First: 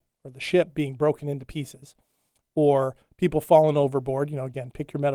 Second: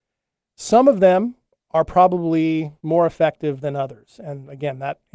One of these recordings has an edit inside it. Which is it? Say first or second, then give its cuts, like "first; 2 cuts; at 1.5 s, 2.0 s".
second; 1 cut; at 2.8 s